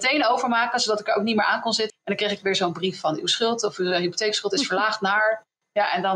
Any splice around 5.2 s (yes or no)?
no